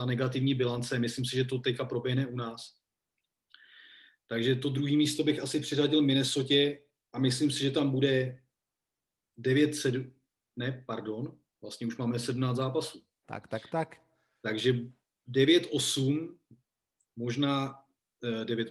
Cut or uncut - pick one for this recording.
uncut